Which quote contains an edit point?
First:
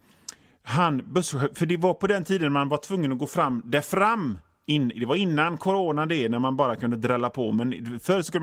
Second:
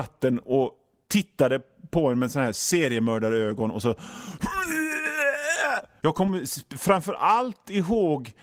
second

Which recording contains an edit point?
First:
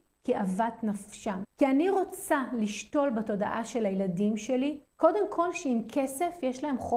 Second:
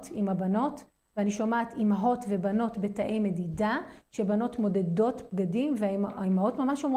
first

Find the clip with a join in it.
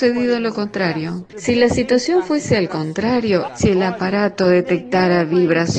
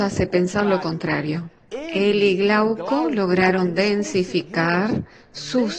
first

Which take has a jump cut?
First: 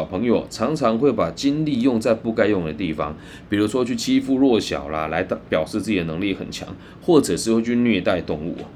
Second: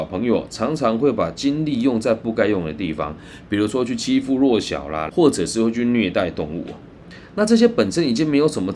second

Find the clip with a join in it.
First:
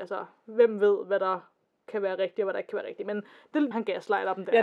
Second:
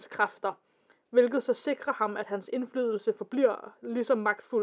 first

